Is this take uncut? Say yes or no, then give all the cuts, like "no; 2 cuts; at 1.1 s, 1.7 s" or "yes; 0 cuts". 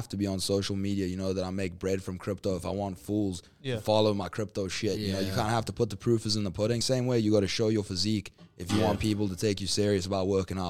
yes; 0 cuts